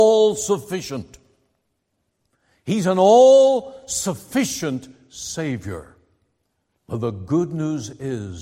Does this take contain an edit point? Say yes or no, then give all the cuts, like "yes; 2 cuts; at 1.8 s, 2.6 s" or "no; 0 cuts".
yes; 1 cut; at 6.8 s